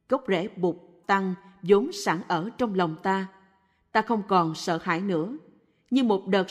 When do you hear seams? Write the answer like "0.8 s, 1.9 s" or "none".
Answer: 1.0 s